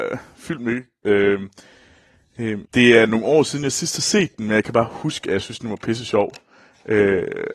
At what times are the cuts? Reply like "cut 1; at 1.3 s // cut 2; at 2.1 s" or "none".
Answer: cut 1; at 1.0 s // cut 2; at 2.7 s